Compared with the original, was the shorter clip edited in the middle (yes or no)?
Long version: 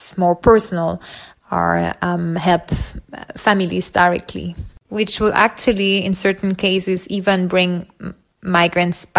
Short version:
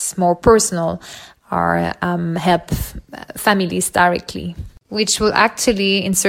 no